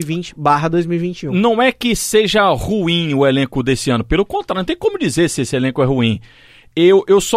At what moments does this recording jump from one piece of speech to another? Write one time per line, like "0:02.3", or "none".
none